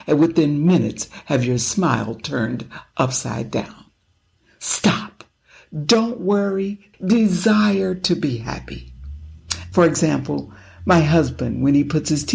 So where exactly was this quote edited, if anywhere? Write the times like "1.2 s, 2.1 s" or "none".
6.9 s, 9.7 s